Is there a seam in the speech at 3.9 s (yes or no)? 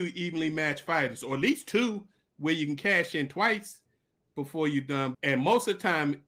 no